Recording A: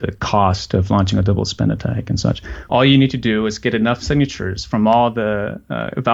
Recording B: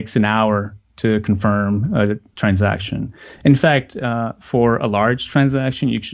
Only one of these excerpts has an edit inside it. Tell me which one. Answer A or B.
A